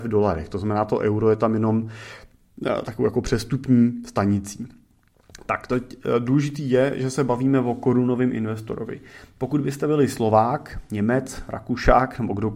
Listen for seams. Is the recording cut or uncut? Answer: uncut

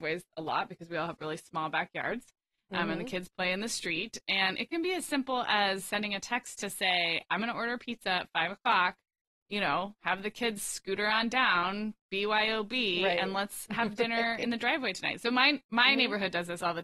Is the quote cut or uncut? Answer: uncut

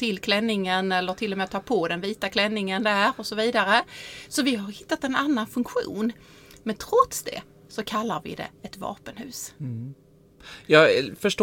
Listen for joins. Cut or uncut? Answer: uncut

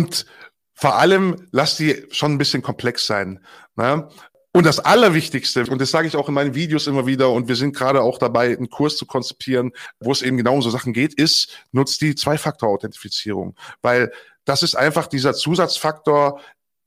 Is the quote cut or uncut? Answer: cut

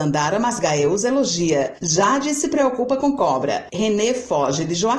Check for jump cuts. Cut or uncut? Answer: uncut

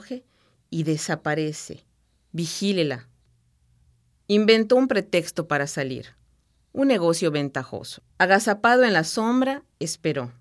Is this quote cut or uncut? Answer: cut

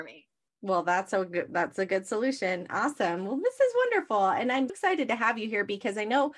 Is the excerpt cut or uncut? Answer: cut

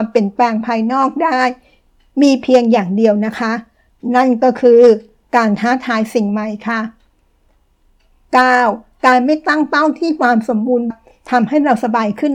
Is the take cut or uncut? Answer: cut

